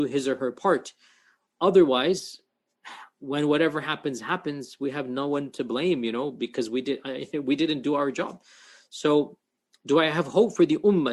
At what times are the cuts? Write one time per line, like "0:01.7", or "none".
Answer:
none

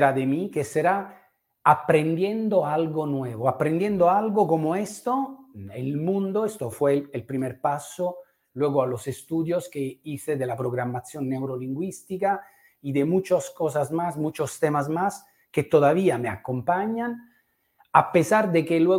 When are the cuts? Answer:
none

